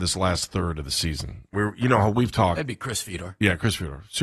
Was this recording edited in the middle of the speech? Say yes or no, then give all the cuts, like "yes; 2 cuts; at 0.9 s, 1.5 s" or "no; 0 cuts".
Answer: yes; 1 cut; at 1.5 s